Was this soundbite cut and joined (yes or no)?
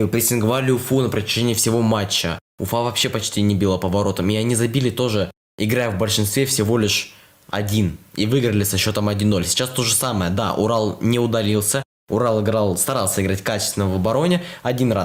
no